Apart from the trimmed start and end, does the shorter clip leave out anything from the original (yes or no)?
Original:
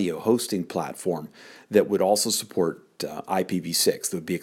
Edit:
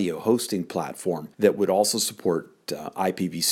yes